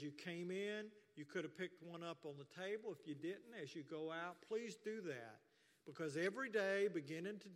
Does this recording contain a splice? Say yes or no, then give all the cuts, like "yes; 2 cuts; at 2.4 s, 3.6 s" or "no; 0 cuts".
no; 0 cuts